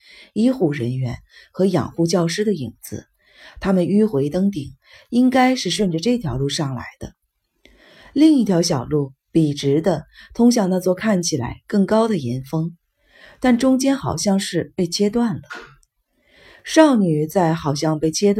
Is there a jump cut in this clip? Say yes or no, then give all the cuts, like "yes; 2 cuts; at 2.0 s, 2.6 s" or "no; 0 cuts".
no; 0 cuts